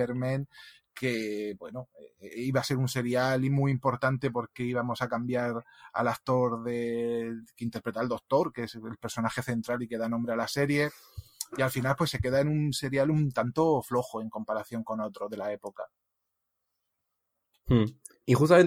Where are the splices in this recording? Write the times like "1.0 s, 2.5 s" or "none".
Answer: none